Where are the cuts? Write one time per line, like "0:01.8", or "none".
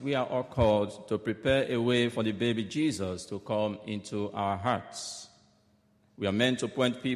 0:06.1